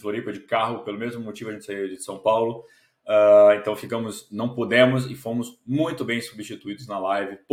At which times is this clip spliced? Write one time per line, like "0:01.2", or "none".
none